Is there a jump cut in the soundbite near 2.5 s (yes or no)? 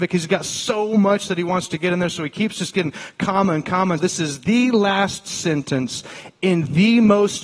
no